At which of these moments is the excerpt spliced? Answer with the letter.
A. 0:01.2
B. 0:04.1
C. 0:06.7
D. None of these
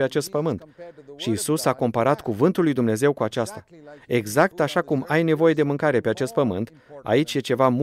D